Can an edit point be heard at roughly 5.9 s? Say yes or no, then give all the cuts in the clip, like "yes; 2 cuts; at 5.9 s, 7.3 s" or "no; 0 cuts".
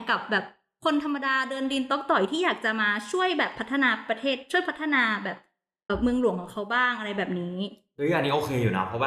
yes; 1 cut; at 5.9 s